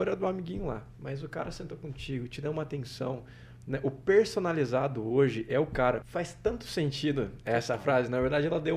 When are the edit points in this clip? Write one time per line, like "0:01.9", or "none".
0:06.0

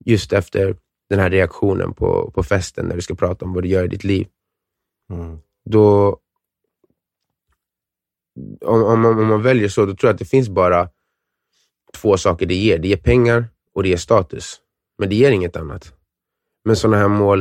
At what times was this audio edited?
none

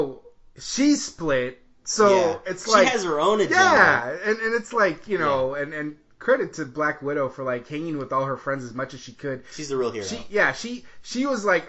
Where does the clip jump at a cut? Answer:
none

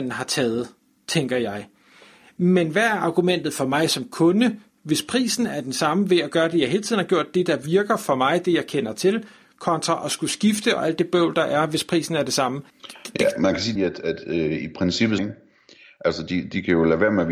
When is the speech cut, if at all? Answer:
0:12.7
0:13.8
0:15.2

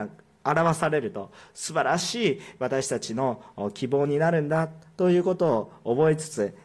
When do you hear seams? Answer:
none

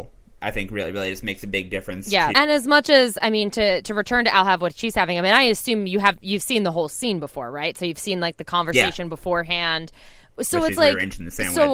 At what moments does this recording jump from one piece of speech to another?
0:02.3

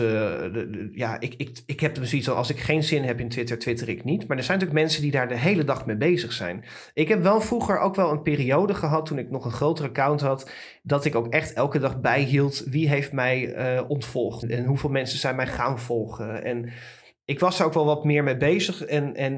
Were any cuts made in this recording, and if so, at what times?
0:14.4

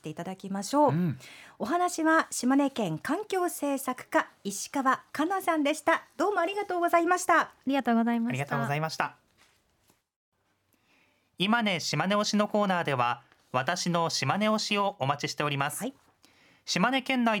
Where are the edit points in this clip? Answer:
none

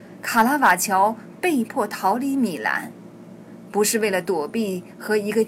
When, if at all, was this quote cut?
none

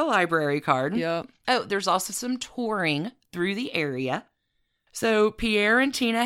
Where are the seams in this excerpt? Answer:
none

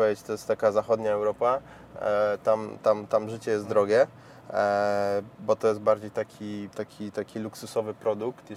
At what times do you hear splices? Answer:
0:05.4
0:06.7

